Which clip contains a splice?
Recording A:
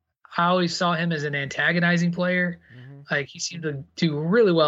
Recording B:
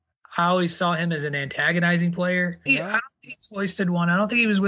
B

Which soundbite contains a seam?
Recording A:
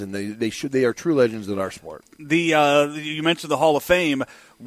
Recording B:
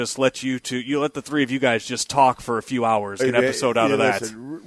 B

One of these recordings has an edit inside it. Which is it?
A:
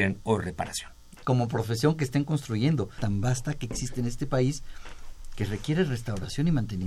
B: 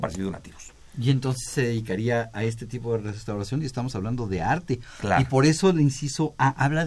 A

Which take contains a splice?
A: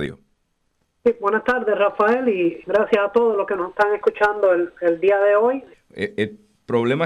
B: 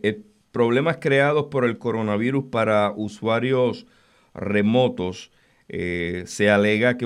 A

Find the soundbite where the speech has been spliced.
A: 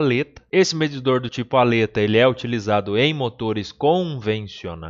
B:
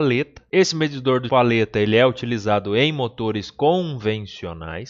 B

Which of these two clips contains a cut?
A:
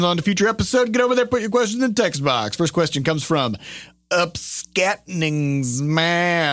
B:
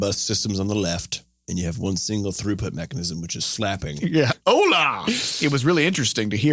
B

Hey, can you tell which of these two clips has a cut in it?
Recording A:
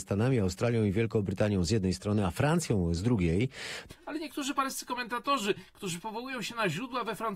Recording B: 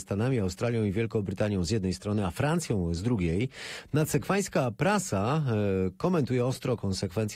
A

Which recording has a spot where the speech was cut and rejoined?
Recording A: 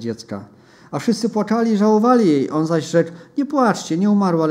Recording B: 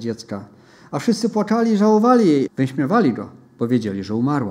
B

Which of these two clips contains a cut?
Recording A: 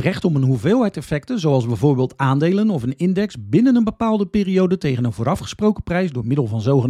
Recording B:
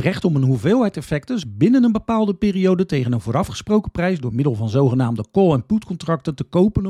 B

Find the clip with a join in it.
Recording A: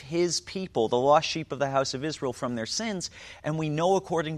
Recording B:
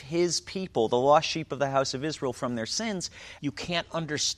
B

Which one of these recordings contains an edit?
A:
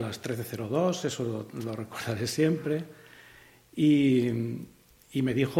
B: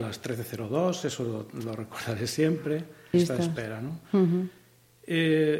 B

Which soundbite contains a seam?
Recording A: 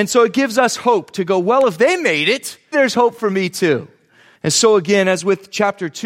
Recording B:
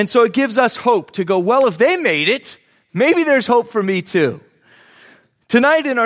A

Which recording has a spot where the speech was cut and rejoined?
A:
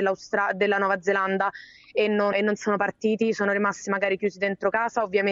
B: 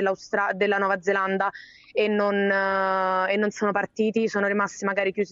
A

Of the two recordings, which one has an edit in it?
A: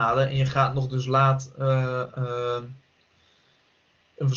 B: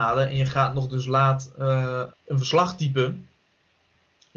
B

